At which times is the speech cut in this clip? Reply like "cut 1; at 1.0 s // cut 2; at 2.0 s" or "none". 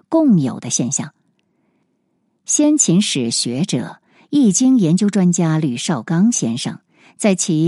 none